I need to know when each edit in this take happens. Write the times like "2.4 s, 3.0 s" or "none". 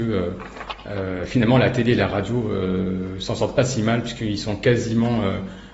none

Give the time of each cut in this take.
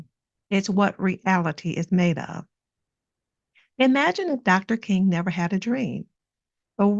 none

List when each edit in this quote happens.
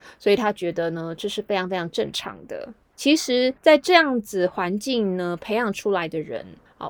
2.9 s

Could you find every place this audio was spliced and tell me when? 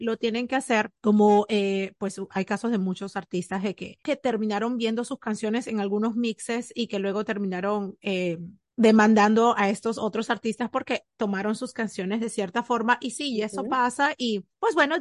none

